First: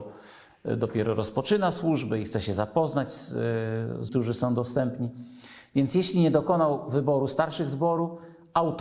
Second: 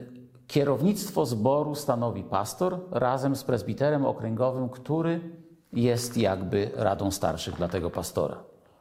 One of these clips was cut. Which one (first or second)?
first